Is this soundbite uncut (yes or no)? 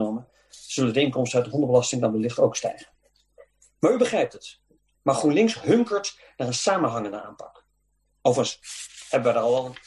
no